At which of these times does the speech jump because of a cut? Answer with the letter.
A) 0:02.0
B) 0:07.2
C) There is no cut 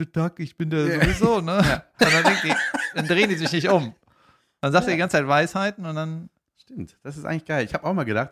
A